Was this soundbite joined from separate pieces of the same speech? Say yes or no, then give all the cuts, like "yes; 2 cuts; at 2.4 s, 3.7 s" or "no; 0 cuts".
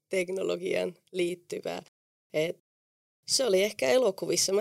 no; 0 cuts